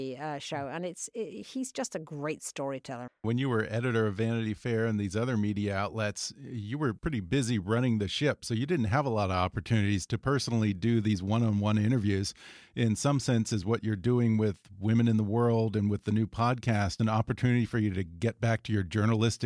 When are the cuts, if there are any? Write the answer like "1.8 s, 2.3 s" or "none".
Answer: 3.1 s

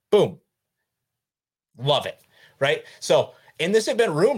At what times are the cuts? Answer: 1.7 s

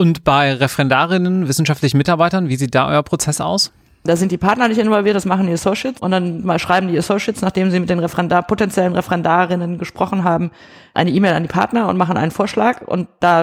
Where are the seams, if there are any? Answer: 6.0 s

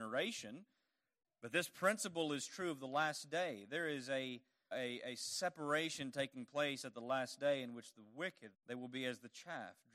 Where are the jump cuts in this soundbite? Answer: 4.7 s, 8.5 s

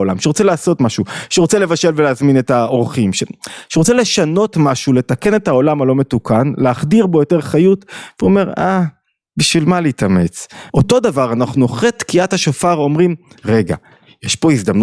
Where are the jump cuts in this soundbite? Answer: 10.7 s

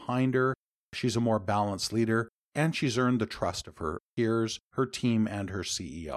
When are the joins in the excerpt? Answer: none

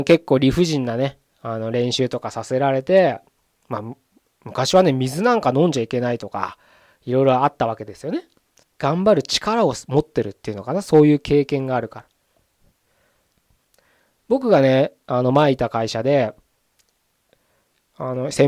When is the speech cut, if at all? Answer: 8.6 s

